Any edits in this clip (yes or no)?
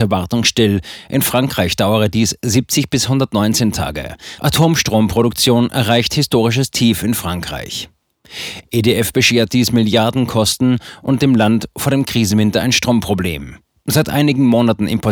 yes